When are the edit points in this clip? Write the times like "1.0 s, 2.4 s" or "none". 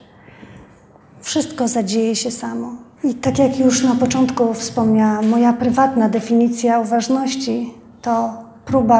1.0 s, 3.0 s